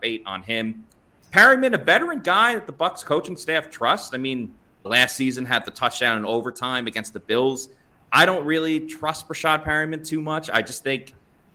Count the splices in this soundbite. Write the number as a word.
one